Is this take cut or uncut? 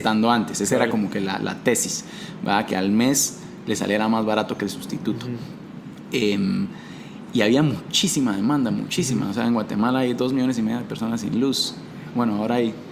uncut